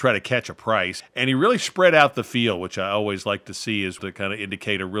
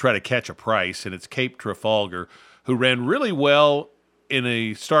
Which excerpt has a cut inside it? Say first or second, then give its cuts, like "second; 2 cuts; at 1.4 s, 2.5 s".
first; 2 cuts; at 1.0 s, 4.0 s